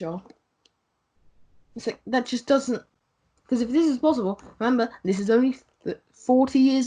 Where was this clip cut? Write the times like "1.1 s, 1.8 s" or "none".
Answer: 3.4 s